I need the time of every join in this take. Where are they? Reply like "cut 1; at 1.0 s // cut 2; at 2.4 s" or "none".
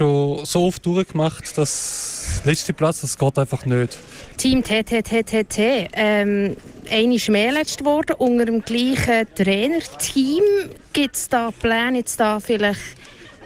cut 1; at 4.3 s